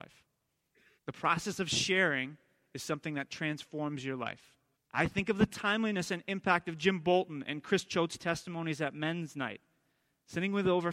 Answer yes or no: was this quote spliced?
yes